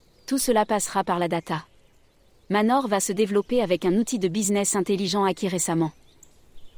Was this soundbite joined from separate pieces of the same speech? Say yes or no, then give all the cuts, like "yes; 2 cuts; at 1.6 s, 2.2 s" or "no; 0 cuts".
no; 0 cuts